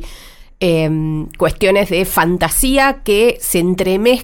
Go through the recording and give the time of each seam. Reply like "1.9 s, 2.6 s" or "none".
none